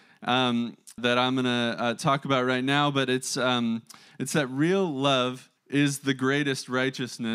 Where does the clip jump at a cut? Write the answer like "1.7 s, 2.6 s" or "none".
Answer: 1.0 s, 5.6 s